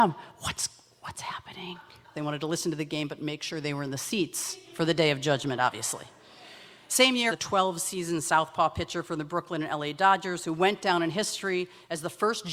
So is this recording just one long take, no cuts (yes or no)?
no